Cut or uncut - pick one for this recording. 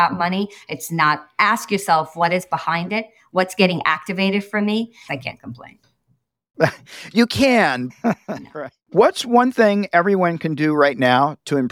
cut